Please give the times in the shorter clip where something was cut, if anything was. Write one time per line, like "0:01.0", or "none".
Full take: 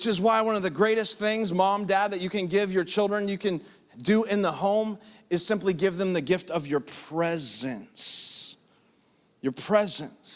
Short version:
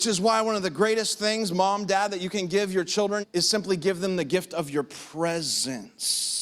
0:03.2